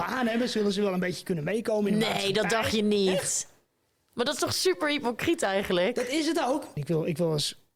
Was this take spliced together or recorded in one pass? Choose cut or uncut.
cut